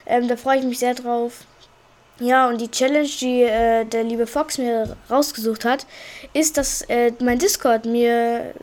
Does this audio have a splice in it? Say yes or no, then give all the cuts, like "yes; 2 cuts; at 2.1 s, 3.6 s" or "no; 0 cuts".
no; 0 cuts